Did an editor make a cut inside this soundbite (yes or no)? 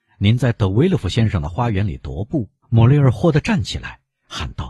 yes